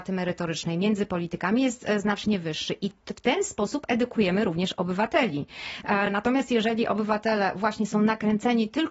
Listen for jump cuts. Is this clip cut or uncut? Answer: uncut